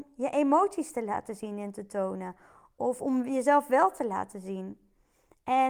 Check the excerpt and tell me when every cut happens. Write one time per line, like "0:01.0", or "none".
none